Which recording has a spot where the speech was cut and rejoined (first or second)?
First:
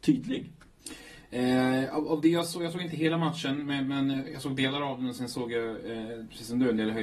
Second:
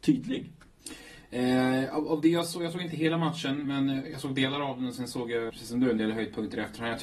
second